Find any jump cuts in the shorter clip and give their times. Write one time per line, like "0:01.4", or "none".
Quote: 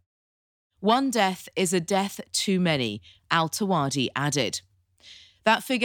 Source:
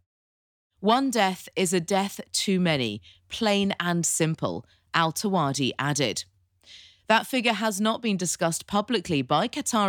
0:03.2

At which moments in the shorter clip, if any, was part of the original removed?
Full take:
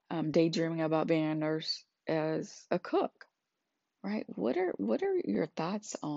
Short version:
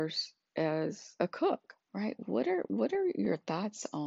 0:01.8

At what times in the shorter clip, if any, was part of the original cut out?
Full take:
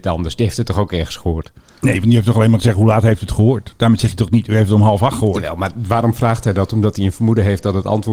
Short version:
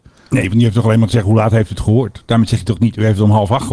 none

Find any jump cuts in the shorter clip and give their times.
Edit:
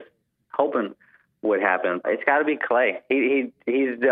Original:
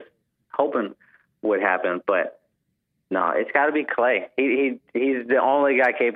0:02.0

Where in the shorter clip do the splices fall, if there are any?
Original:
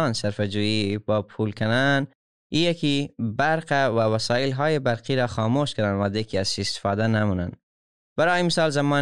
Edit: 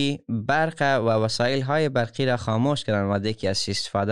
none

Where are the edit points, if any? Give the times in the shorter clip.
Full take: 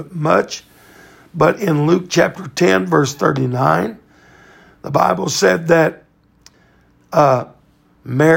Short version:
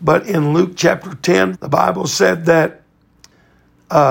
0:01.5

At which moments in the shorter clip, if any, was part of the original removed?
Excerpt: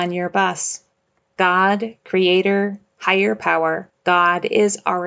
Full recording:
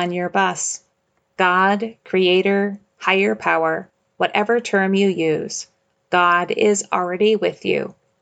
0:04.0

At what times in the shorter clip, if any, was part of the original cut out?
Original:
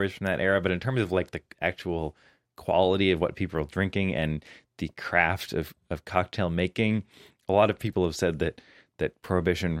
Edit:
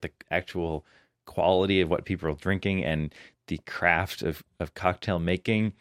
none

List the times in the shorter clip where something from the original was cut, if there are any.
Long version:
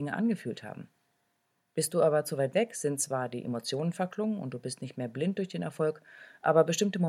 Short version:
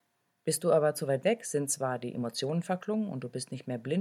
none

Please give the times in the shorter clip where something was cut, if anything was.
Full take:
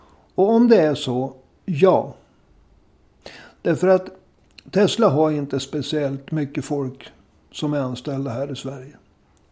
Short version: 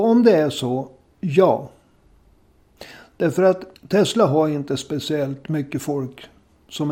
0:03.8

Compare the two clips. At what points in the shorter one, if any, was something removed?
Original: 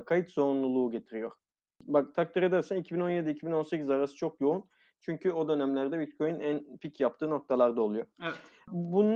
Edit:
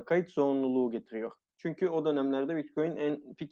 0:01.5

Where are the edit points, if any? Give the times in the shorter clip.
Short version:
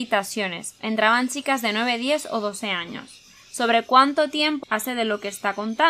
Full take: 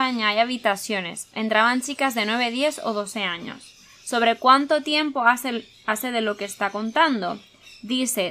0:04.6

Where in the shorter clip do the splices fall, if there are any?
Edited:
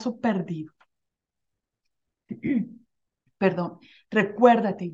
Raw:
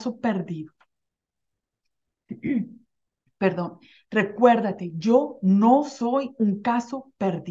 none

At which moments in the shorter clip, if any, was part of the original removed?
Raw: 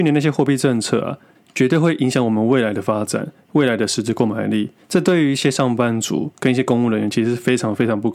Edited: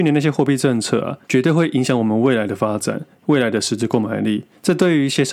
0:01.2

